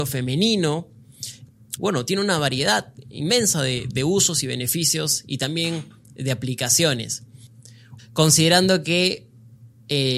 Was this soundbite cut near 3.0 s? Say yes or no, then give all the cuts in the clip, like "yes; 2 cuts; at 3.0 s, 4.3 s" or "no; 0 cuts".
no; 2 cuts; at 1.8 s, 8.0 s